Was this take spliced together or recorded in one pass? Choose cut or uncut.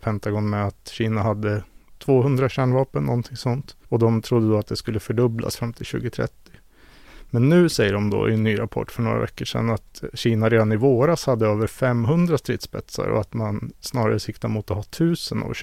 cut